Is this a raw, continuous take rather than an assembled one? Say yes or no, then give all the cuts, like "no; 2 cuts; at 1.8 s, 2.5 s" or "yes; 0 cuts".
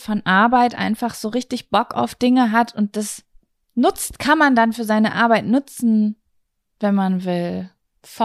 yes; 0 cuts